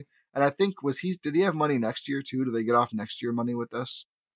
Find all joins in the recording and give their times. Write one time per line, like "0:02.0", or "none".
none